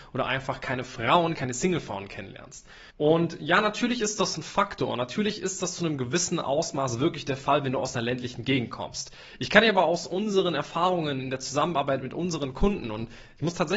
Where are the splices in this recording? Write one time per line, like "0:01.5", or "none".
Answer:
0:02.9